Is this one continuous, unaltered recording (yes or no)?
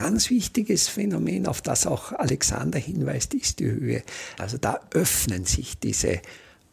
no